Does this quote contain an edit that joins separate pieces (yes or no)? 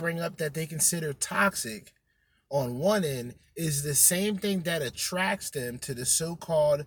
no